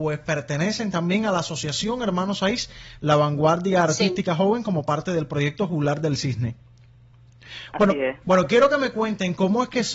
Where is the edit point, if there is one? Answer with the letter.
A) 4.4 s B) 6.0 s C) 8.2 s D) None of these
C